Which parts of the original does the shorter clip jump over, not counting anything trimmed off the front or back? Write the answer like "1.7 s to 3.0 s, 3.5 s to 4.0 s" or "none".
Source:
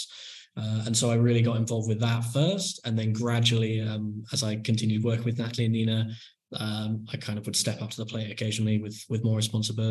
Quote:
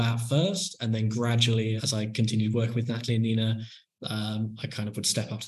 3.8 s to 4.3 s